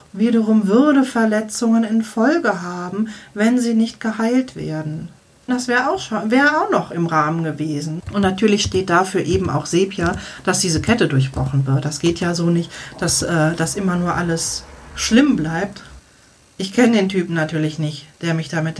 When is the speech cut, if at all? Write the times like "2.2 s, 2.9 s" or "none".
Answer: 5.5 s, 8.0 s